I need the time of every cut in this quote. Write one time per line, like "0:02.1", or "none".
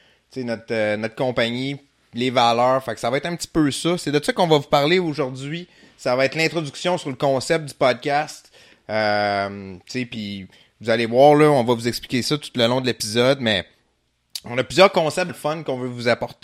0:15.3